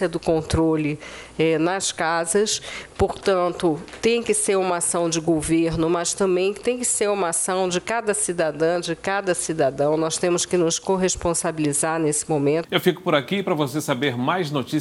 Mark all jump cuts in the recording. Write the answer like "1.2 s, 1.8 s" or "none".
12.6 s